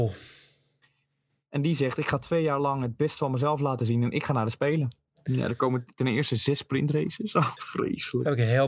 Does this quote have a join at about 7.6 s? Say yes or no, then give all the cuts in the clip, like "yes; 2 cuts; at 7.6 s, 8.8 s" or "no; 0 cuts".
yes; 2 cuts; at 5.1 s, 7.6 s